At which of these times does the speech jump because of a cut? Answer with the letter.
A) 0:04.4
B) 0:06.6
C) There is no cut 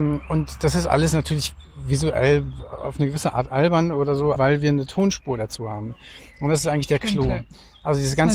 A